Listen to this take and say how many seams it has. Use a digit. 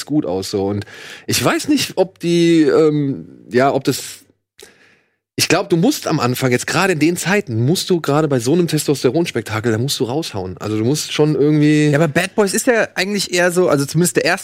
0